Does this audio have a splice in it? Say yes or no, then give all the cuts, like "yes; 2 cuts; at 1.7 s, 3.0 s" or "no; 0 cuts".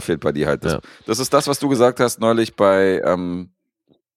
no; 0 cuts